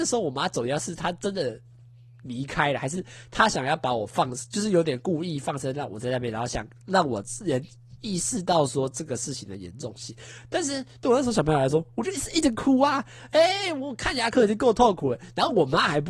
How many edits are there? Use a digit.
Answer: 0